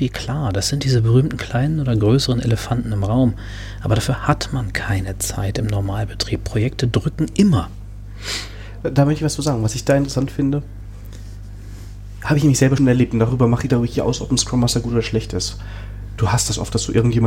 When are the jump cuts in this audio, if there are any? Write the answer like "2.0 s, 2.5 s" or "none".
12.8 s, 14.2 s